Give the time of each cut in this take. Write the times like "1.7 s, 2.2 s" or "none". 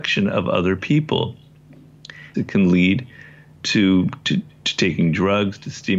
2.3 s